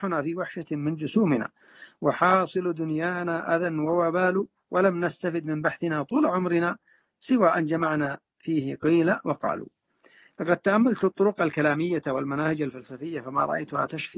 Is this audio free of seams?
yes; 0 cuts

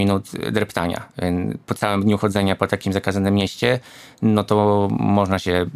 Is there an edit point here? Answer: no; 0 cuts

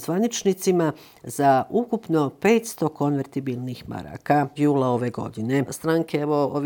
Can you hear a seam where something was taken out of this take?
yes; 2 cuts; at 4.6 s, 5.7 s

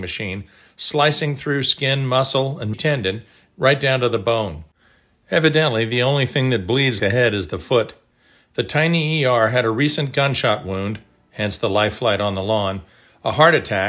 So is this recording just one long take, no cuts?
no; 2 cuts; at 2.7 s, 7.0 s

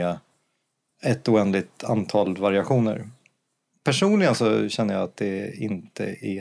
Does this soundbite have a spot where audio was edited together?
no; 0 cuts

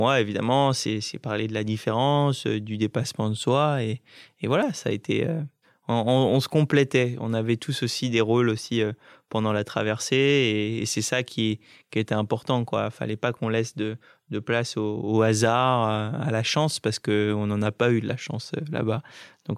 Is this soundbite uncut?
yes; 0 cuts

